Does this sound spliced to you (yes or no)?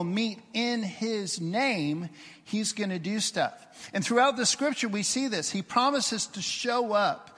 no